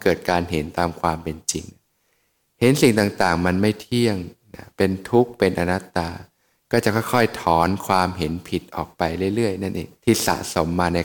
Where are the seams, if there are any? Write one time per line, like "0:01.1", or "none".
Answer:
0:10.0